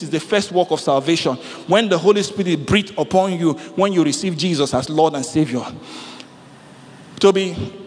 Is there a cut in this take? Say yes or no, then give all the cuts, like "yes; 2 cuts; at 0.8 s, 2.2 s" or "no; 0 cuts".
no; 0 cuts